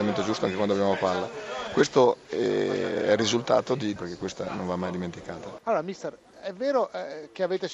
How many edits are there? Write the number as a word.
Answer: one